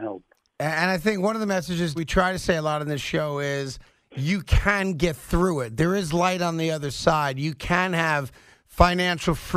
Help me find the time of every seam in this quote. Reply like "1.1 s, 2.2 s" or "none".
2.0 s